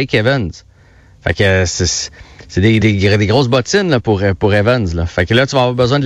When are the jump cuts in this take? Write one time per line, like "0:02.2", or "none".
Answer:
0:02.8